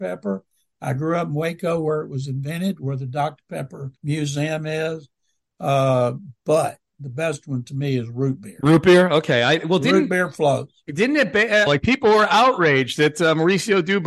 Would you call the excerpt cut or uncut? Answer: cut